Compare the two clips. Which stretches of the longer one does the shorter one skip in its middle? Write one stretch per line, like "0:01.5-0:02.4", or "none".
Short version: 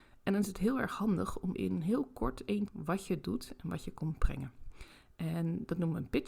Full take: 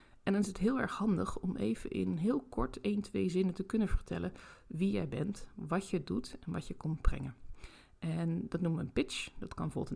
0:01.5-0:01.9
0:03.0-0:05.5